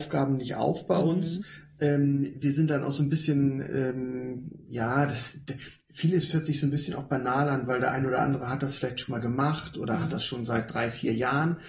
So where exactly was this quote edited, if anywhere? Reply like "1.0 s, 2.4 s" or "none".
none